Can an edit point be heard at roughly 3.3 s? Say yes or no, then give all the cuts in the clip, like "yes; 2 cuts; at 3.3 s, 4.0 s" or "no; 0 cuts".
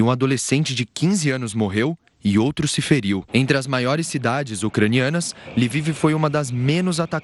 yes; 1 cut; at 3.3 s